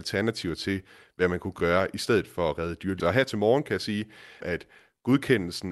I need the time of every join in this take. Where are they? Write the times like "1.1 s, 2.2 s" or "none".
3.0 s, 4.4 s